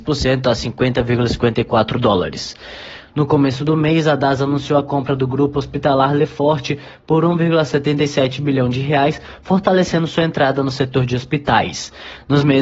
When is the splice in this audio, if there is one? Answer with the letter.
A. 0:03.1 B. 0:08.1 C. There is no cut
A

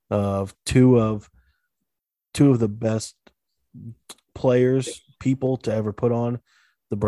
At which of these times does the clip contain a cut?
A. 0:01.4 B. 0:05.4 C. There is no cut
C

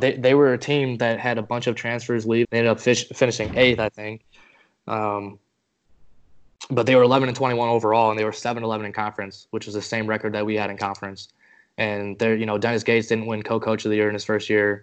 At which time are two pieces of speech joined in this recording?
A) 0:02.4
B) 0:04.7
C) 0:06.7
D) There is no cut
A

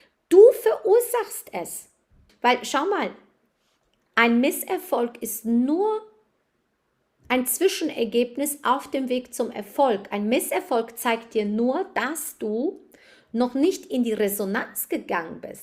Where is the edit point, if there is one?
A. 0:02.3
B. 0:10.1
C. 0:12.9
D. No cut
A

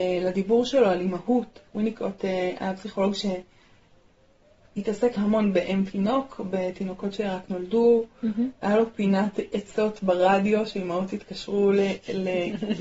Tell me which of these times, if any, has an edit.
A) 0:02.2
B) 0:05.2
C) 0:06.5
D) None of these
B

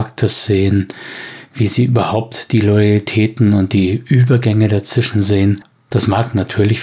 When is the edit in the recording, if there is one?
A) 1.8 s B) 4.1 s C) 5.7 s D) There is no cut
C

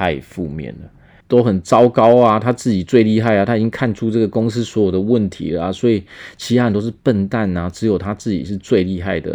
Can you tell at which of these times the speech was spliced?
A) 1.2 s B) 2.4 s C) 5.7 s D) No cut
A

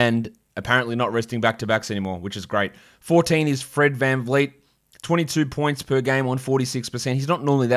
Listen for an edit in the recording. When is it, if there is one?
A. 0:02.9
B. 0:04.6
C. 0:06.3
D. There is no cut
D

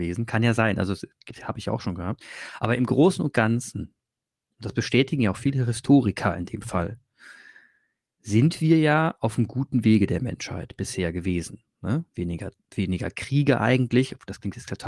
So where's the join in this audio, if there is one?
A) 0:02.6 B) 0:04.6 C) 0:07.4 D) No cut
D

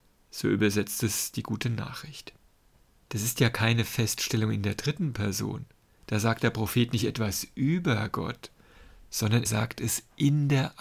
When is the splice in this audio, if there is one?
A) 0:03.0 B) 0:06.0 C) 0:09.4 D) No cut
C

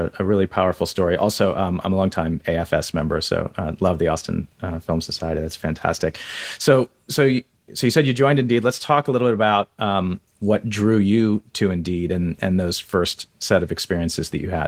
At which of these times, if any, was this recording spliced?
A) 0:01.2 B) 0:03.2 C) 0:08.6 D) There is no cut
D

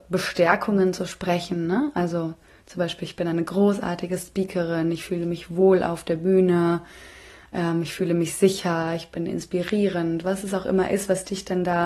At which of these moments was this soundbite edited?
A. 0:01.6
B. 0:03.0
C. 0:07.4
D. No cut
D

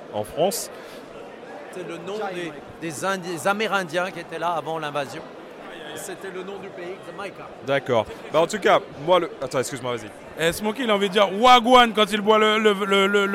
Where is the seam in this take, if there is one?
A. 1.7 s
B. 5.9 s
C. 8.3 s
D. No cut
A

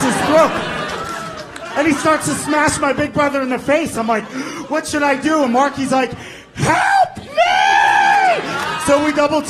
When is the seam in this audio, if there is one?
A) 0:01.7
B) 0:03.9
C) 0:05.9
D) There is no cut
A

